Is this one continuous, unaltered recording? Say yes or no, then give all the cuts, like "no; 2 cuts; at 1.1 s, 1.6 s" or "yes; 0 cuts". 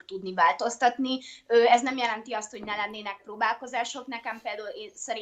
yes; 0 cuts